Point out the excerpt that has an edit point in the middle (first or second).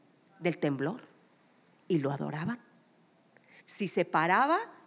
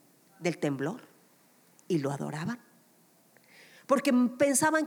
first